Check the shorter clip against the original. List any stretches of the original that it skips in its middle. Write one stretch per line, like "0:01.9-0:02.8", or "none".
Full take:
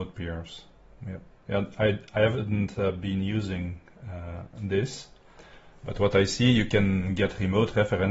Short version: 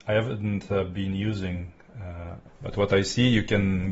0:04.5-0:05.7